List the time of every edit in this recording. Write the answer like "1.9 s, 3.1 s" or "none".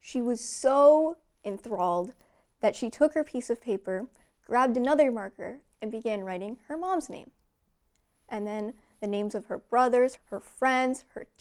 8.1 s, 10.2 s